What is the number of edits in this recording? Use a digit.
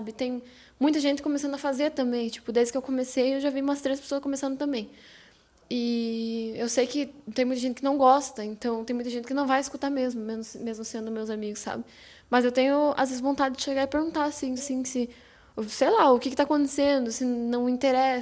1